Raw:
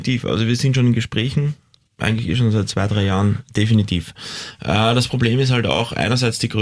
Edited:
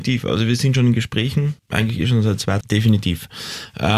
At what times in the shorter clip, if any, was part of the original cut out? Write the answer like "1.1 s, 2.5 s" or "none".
1.6 s, 2.6 s